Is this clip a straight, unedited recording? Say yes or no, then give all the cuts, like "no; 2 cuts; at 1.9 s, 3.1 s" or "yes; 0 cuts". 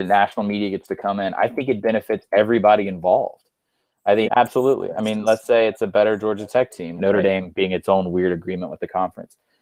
no; 2 cuts; at 4.3 s, 7.0 s